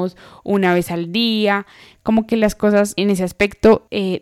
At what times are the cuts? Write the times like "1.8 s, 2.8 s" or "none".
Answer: 3.0 s